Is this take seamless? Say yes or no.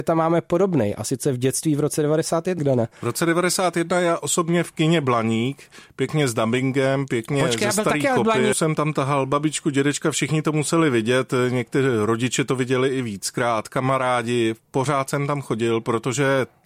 no